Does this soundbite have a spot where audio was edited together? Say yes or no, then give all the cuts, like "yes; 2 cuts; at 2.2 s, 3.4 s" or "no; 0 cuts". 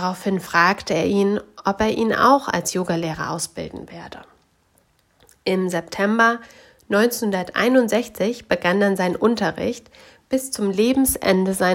no; 0 cuts